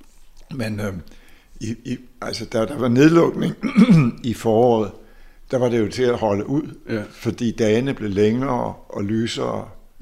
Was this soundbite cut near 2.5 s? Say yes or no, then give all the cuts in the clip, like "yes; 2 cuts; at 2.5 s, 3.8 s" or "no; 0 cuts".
no; 0 cuts